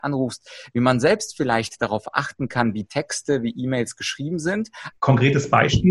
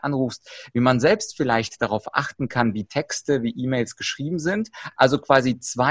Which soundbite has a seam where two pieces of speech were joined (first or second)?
first